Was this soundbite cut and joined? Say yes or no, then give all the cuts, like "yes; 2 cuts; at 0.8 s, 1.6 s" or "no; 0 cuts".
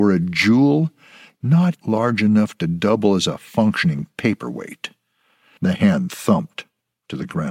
yes; 2 cuts; at 1.8 s, 5.6 s